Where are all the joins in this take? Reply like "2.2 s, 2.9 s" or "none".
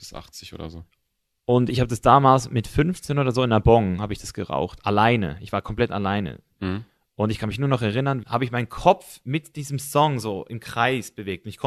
8.2 s